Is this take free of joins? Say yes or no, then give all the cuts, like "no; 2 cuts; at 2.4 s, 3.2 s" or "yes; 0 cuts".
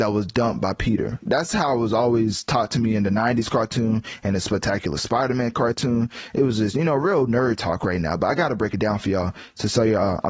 yes; 0 cuts